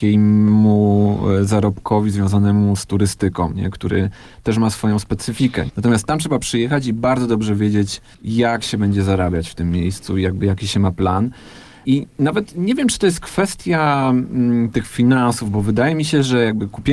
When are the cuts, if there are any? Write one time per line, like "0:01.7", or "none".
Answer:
0:05.7

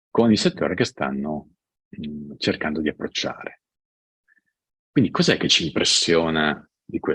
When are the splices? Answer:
none

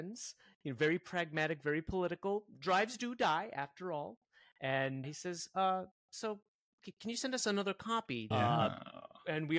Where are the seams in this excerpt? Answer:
0:05.0
0:08.3

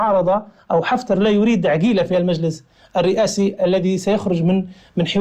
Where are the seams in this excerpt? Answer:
none

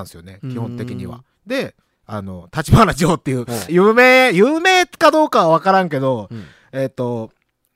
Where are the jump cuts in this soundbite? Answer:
0:03.7

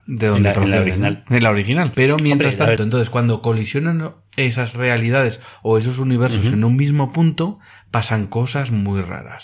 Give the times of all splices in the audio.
0:02.8

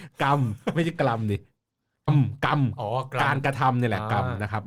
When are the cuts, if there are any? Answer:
0:02.1

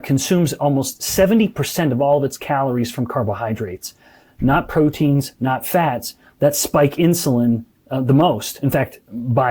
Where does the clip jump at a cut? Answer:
0:04.3

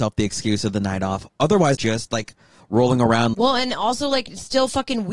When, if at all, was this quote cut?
0:01.8
0:03.3

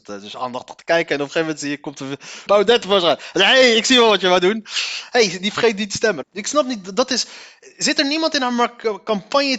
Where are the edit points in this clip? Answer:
0:02.5
0:06.2

